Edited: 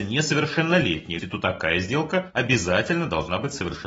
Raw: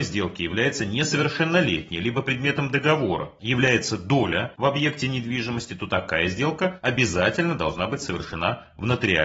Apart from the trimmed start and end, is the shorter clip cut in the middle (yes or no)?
yes